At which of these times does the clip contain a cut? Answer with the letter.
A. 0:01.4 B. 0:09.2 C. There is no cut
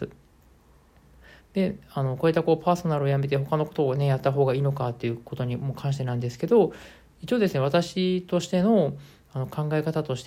A